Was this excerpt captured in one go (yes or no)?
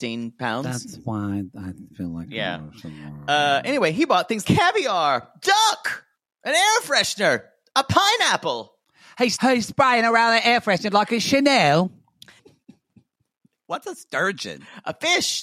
no